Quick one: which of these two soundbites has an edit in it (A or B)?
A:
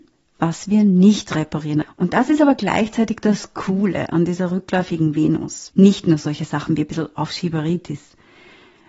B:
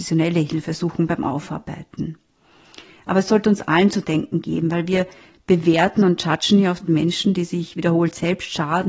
A